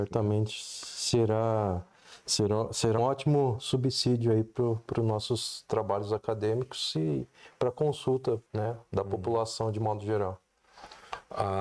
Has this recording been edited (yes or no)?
yes